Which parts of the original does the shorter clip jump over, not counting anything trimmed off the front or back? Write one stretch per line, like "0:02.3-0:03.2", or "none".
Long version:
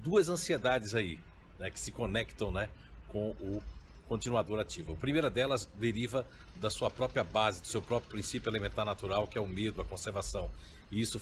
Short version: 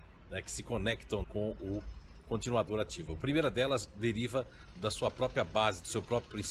0:02.5-0:03.0